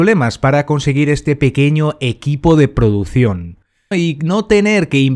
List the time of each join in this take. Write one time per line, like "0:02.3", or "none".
0:03.9